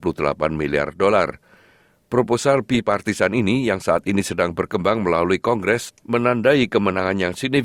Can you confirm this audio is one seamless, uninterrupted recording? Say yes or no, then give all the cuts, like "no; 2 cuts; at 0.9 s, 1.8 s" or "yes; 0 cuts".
yes; 0 cuts